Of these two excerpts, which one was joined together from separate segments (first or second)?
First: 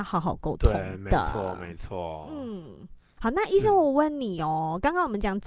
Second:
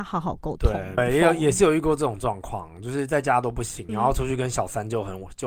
second